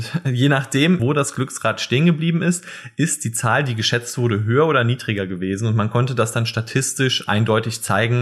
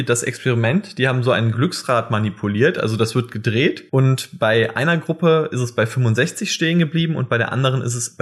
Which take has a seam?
first; 1 cut; at 1.0 s

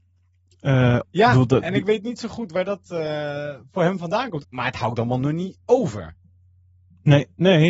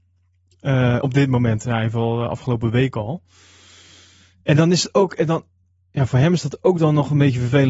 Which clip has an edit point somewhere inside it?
first; 2 cuts; at 1.0 s, 4.4 s

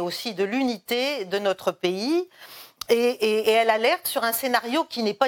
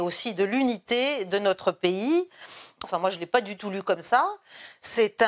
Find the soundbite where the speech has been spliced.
second; 1 cut; at 2.8 s

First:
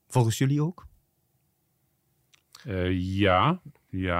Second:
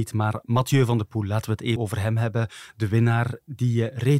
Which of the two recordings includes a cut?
second; 1 cut; at 1.8 s

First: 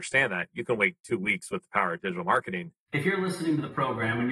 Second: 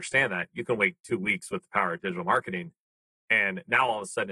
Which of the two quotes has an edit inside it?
first; 1 cut; at 2.9 s

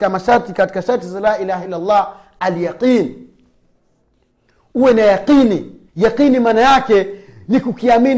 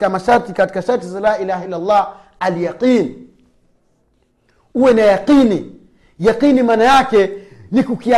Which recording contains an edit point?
first; 1 cut; at 5.9 s

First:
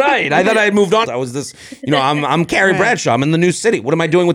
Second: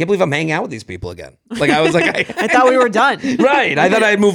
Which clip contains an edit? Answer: first; 1 cut; at 1.0 s

